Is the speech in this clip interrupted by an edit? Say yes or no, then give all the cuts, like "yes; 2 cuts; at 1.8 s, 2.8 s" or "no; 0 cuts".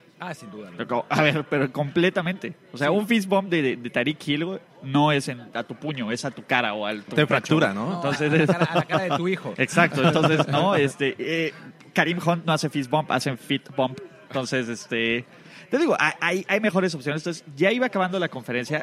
no; 0 cuts